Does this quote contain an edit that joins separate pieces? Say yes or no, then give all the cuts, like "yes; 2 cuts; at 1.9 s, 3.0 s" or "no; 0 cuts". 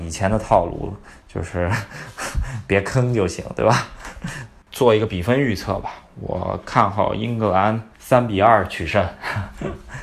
yes; 2 cuts; at 4.7 s, 7.9 s